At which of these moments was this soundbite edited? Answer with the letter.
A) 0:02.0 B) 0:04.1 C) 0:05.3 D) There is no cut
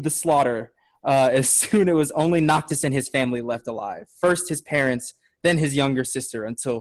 D